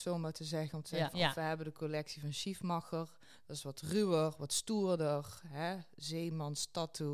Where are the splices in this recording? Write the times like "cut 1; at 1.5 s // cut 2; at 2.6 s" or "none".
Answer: cut 1; at 1.1 s